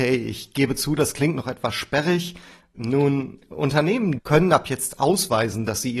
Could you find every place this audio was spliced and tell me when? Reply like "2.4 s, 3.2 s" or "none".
2.7 s, 4.2 s

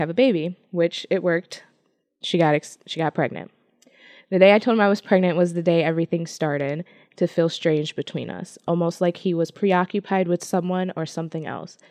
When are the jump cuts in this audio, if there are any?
none

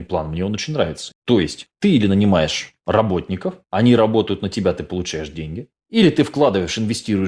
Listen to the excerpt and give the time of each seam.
1.1 s

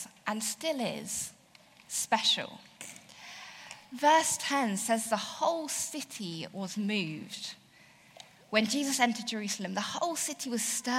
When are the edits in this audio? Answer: none

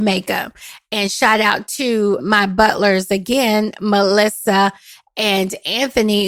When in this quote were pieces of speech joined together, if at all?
none

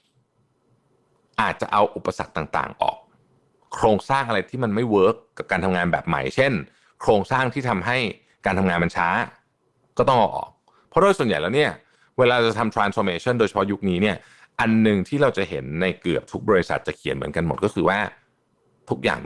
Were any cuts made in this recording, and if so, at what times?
none

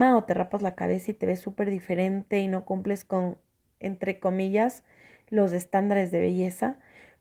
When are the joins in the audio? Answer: none

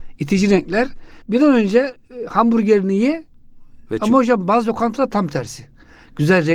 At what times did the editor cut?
1.2 s

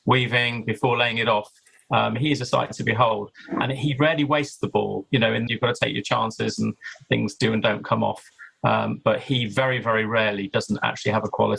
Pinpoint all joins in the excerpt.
5.5 s

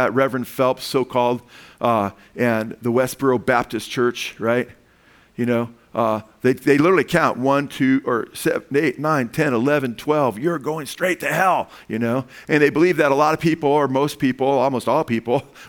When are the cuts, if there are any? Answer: none

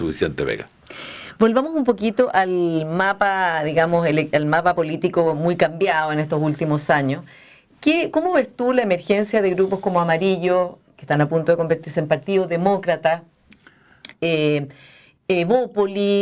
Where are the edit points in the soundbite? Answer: none

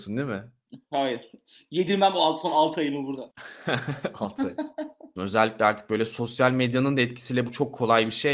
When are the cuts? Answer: 5.2 s

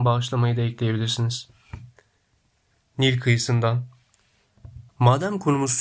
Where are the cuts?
4.9 s

